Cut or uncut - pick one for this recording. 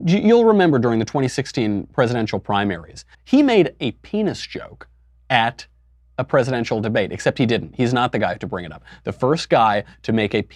cut